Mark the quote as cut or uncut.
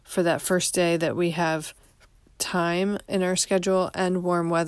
uncut